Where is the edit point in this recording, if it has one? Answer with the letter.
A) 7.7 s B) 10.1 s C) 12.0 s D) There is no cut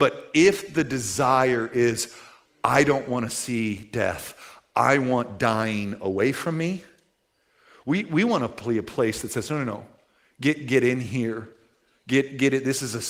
D